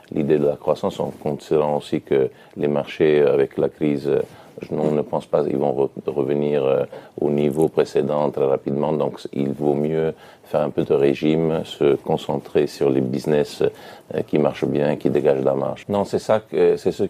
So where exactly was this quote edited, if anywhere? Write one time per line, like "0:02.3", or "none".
0:08.3
0:15.8

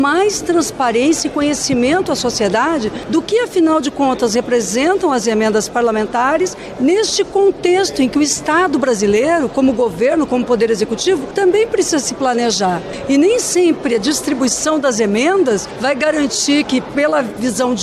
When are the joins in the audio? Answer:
none

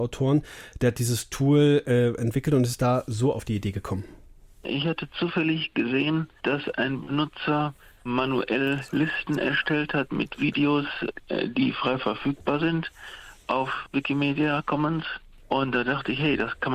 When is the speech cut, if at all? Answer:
none

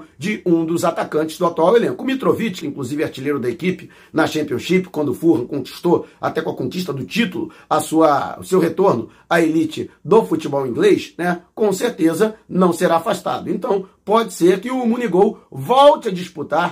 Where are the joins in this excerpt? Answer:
0:02.6

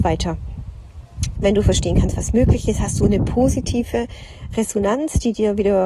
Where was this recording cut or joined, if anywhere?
0:01.4
0:04.5

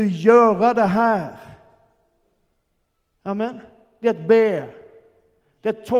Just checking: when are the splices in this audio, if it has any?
none

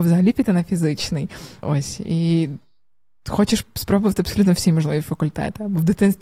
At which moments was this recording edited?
0:01.6

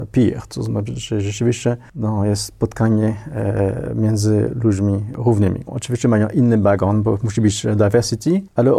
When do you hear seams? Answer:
0:05.7

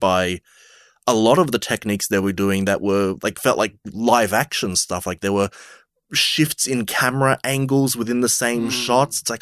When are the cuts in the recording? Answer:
none

